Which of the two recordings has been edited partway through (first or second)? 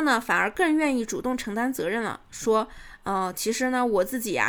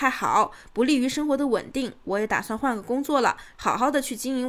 second